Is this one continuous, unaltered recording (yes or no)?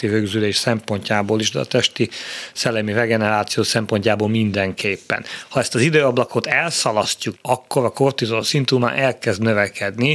no